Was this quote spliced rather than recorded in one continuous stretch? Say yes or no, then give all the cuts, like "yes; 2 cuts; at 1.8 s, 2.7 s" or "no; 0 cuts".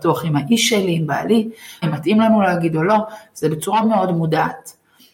yes; 2 cuts; at 1.8 s, 3.8 s